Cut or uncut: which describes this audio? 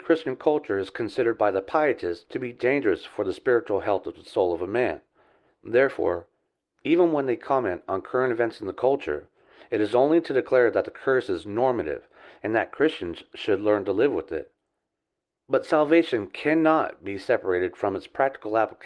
uncut